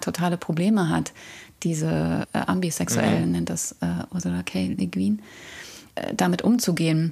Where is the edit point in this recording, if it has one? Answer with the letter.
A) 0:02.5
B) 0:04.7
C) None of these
C